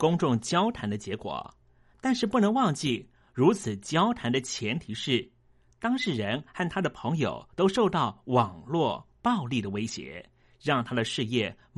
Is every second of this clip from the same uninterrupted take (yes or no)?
yes